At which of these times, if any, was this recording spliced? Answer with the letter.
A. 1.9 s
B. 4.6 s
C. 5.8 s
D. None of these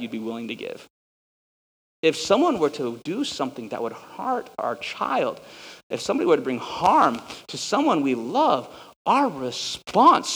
A